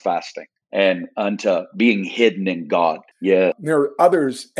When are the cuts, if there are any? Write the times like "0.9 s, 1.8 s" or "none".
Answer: 3.1 s

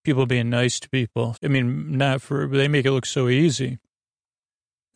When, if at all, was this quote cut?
1.3 s

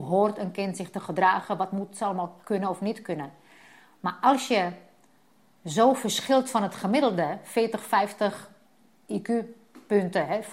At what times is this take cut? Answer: none

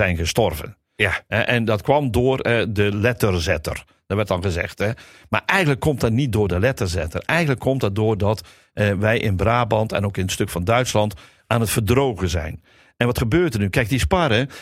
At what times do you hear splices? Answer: none

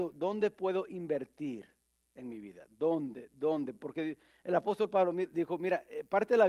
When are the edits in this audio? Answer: none

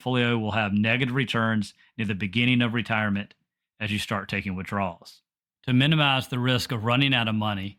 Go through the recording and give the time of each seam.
5.5 s

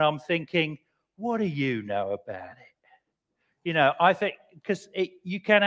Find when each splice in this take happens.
none

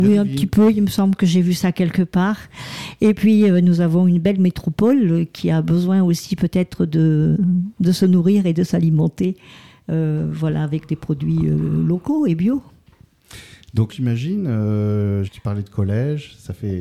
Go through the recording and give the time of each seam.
13.9 s, 15.3 s

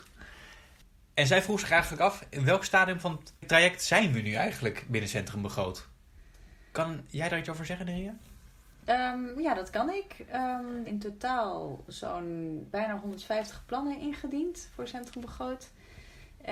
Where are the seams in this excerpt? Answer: 10.8 s, 12.7 s

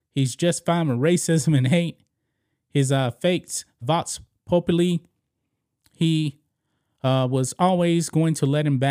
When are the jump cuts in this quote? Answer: 3.8 s

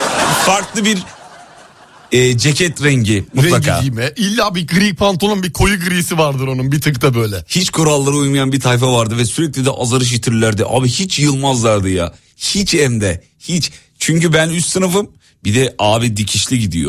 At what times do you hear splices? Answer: none

